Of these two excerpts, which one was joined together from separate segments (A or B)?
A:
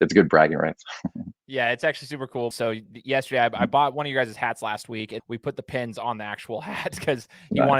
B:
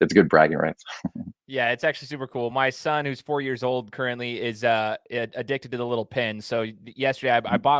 A